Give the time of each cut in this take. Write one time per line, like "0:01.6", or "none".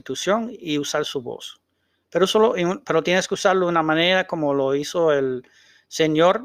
none